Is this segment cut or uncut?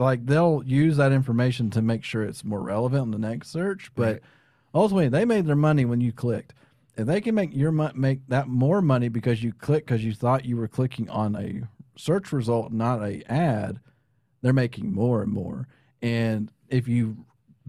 uncut